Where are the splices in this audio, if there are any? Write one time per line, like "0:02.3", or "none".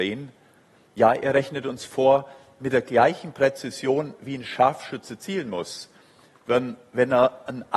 none